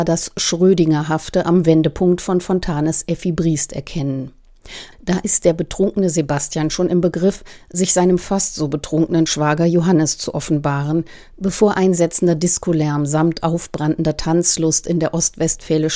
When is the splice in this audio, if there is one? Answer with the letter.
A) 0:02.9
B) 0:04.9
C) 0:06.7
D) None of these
B